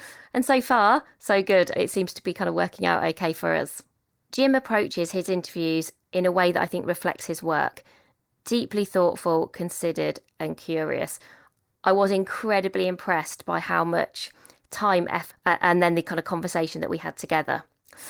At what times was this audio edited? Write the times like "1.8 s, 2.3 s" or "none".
15.3 s